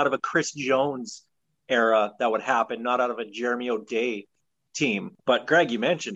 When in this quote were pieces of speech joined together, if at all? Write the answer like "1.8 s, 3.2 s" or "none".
5.2 s